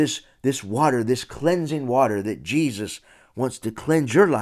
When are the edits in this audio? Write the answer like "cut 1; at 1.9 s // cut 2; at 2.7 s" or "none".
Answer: none